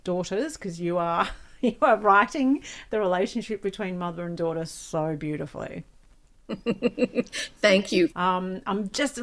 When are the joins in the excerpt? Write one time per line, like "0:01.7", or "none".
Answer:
0:08.1